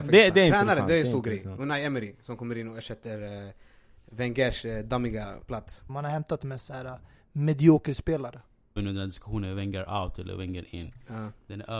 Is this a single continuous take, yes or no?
no